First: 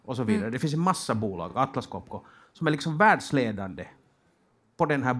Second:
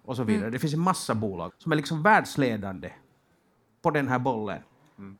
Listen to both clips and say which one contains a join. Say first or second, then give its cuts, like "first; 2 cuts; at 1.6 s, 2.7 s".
second; 1 cut; at 1.5 s